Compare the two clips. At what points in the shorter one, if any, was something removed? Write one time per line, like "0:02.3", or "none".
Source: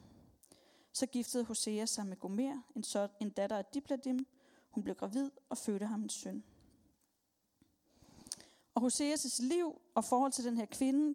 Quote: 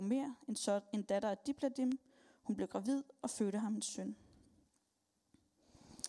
none